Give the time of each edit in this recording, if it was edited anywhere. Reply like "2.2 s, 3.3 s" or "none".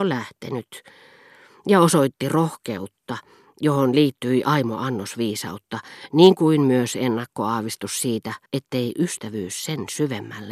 8.5 s